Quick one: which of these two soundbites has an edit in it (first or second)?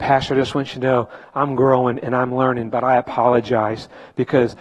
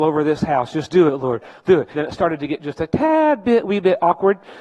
second